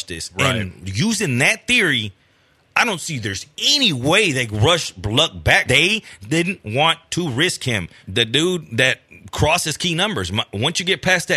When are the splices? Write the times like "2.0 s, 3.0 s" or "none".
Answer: 5.7 s, 8.0 s